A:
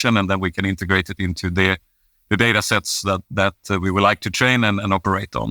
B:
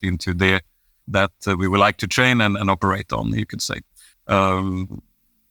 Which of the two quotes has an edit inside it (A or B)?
B